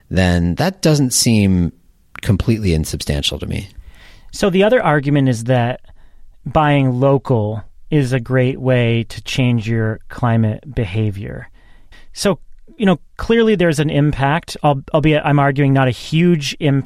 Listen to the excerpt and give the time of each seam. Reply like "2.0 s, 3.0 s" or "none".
11.9 s

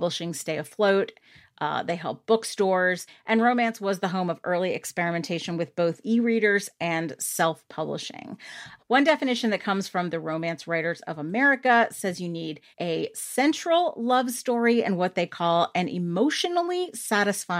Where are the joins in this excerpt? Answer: 8.8 s, 12.7 s

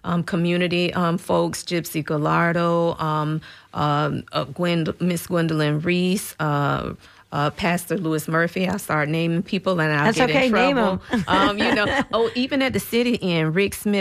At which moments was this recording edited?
none

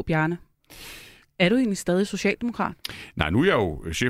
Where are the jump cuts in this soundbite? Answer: 1.2 s

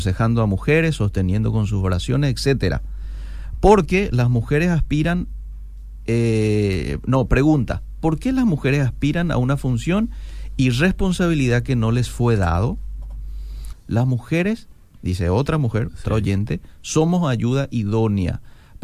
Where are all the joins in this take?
13.7 s

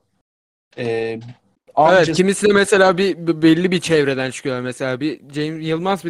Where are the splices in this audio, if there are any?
none

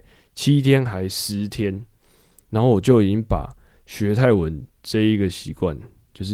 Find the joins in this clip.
none

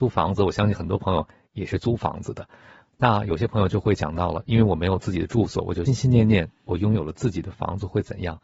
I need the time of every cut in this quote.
5.9 s

